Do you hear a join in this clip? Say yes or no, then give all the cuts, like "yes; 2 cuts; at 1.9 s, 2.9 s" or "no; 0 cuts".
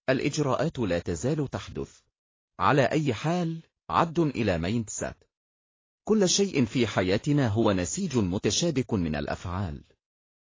yes; 2 cuts; at 2.4 s, 6.0 s